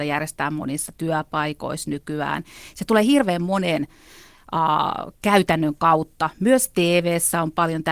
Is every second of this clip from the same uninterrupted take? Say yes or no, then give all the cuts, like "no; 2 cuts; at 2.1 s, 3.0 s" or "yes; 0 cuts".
yes; 0 cuts